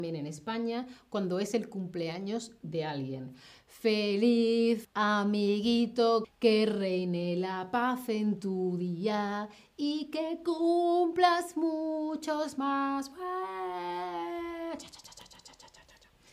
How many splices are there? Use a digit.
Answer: 2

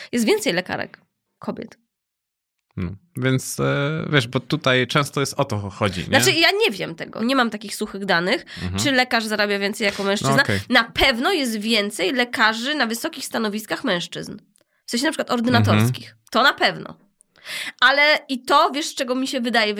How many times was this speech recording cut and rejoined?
1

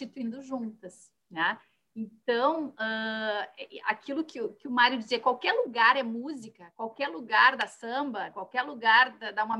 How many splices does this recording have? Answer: 0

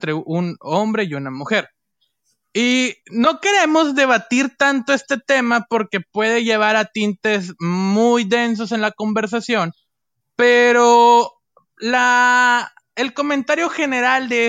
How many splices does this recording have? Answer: 0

